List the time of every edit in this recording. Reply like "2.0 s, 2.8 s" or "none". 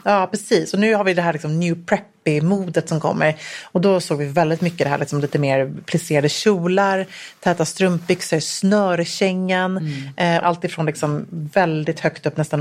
10.4 s